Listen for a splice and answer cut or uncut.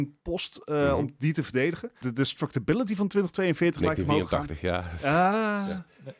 cut